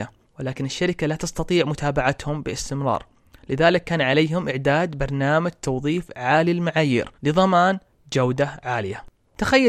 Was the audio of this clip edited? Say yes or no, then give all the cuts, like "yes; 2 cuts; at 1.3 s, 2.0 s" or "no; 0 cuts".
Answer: yes; 1 cut; at 7.1 s